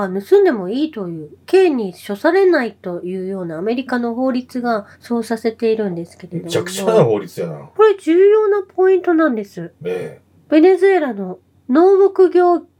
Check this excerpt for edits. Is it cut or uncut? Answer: cut